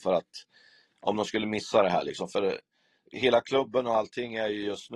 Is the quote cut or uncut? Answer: uncut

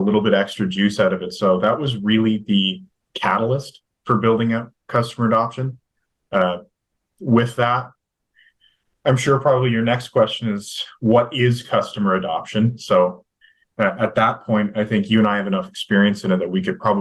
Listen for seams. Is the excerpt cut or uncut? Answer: uncut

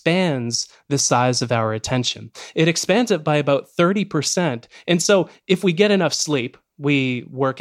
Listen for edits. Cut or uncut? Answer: uncut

